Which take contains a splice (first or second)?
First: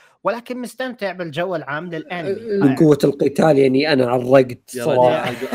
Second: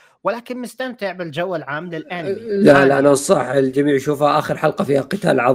first